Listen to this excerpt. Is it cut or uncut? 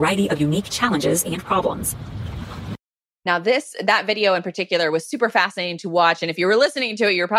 uncut